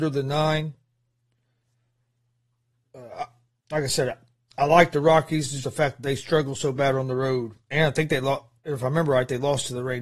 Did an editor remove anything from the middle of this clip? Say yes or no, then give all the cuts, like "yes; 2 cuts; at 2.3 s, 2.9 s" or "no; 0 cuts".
yes; 2 cuts; at 5.6 s, 7.6 s